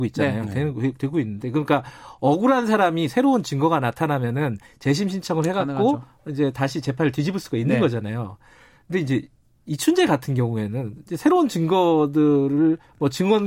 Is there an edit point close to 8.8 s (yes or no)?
no